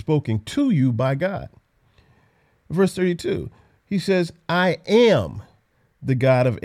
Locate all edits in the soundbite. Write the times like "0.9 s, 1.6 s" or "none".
none